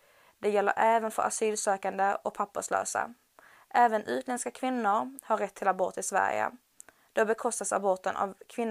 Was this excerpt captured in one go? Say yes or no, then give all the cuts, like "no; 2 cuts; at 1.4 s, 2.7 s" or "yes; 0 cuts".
yes; 0 cuts